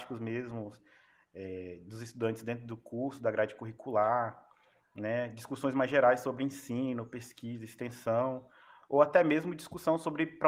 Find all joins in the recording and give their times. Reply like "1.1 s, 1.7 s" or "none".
none